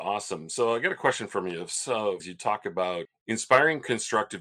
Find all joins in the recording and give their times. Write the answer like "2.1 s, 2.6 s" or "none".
2.2 s